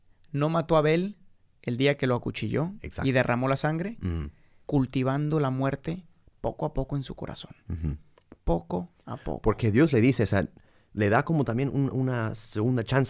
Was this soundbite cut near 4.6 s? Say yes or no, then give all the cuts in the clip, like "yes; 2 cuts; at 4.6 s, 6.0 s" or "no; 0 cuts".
yes; 1 cut; at 4.6 s